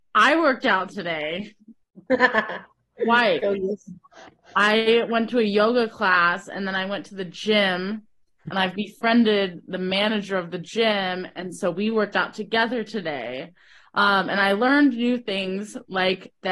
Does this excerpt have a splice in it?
no; 0 cuts

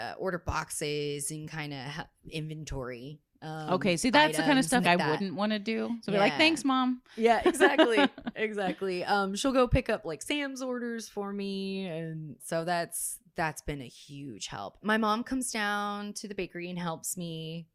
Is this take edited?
yes; 3 cuts; at 4.8 s, 12.4 s, 14.8 s

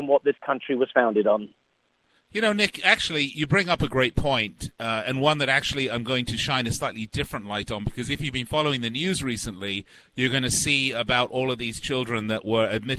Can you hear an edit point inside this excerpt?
no; 0 cuts

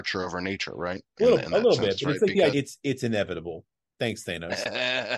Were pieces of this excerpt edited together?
yes; 1 cut; at 2.5 s

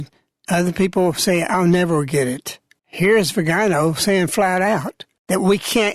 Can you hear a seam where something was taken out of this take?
yes; 1 cut; at 2.8 s

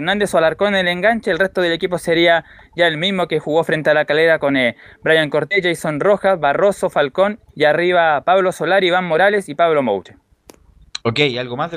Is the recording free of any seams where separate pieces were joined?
no; 1 cut; at 7.5 s

